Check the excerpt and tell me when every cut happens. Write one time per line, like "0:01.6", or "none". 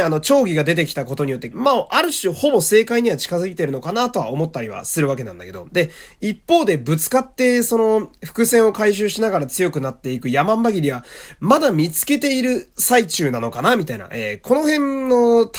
0:01.5
0:05.7